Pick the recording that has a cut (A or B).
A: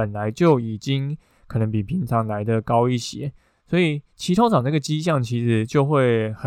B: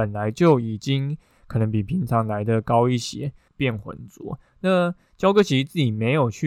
B